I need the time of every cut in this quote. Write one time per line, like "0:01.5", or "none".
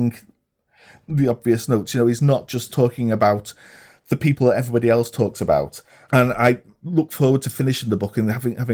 none